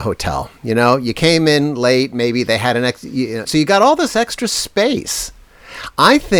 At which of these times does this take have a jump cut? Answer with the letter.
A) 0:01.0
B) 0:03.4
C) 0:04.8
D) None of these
B